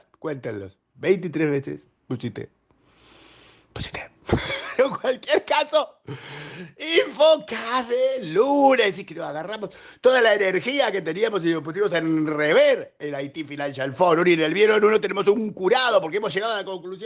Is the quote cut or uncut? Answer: uncut